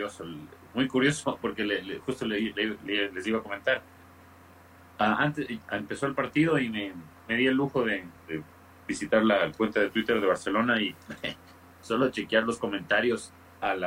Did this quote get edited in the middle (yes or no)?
no